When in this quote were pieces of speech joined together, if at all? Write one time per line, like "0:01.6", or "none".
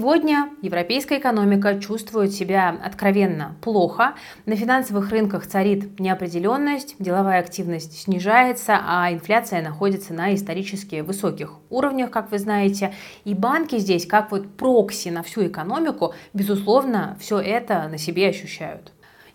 none

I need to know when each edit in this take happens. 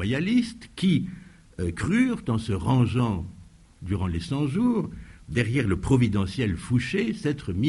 none

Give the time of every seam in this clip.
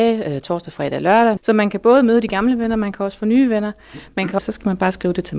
0:01.4
0:04.4

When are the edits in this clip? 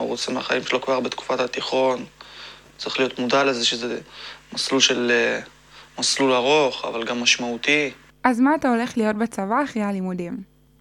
none

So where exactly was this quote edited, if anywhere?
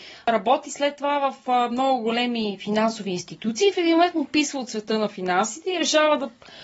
none

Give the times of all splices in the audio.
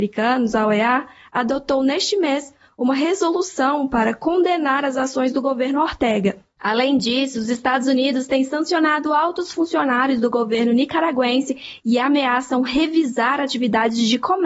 none

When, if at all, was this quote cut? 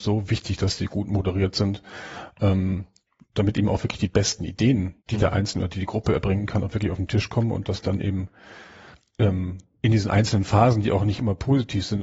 0:05.0

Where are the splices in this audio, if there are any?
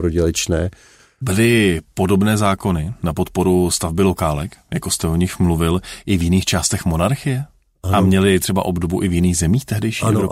0:01.2

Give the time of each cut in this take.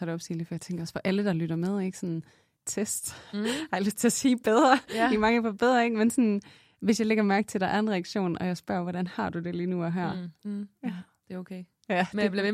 0:02.6
0:10.4

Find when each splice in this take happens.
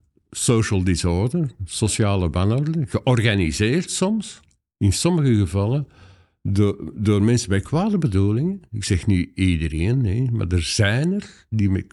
none

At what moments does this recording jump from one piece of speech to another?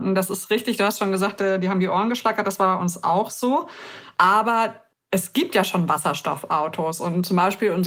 none

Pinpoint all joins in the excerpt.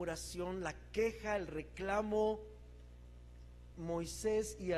0:03.7

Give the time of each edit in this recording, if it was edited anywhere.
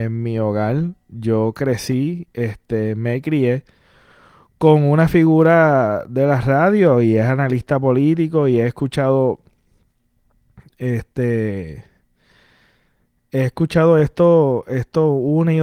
none

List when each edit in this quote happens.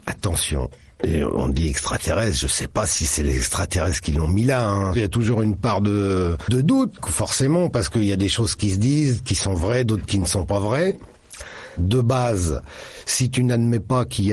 none

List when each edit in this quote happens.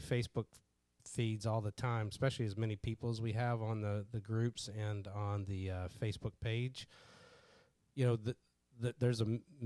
none

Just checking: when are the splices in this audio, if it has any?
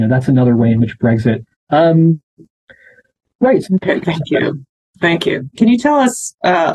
0:01.7
0:03.6
0:05.6

